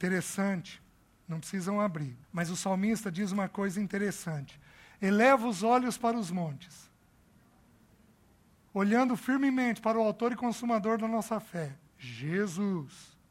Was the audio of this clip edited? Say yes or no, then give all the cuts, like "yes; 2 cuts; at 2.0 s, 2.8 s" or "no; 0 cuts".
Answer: yes; 3 cuts; at 2.2 s, 8.7 s, 11.9 s